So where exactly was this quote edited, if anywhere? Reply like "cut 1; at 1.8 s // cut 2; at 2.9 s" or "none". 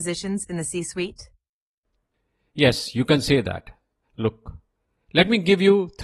none